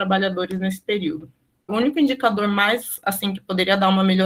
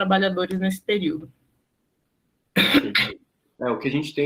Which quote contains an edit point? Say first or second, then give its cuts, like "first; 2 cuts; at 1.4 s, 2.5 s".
first; 1 cut; at 1.7 s